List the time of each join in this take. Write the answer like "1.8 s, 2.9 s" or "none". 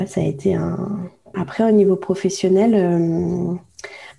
1.3 s